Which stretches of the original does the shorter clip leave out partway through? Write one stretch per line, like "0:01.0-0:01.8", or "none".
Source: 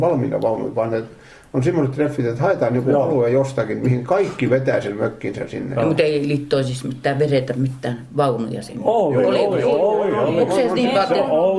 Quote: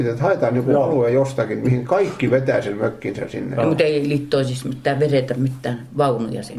none